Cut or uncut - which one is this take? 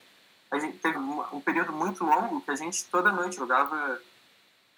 cut